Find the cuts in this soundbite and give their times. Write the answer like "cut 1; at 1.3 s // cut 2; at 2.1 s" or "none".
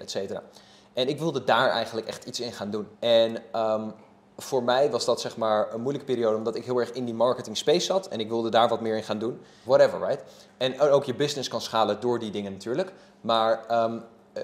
cut 1; at 2.9 s // cut 2; at 9.6 s